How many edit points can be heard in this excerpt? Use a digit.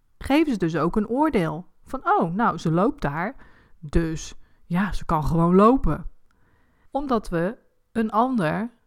1